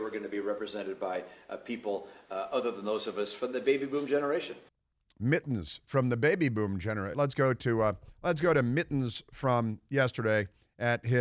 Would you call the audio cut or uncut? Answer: cut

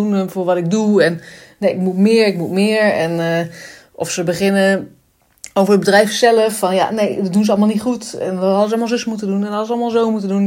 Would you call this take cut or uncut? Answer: uncut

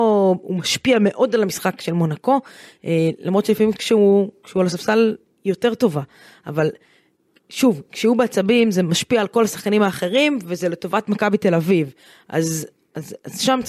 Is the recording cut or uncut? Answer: uncut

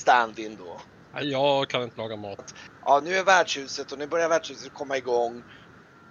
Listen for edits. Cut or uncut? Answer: cut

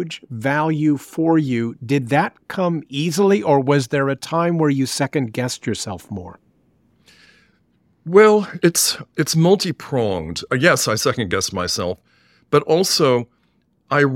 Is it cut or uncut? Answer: uncut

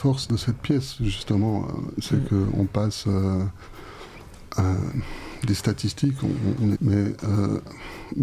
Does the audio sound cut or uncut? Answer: cut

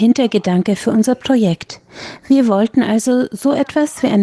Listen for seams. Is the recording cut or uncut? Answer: uncut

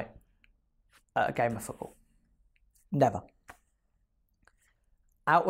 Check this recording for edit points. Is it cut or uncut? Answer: uncut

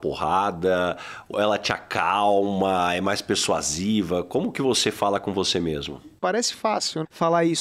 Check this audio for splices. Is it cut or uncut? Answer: cut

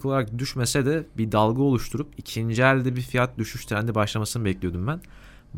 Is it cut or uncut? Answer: uncut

